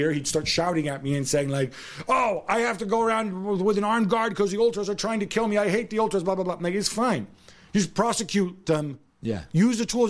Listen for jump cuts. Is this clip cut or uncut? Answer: uncut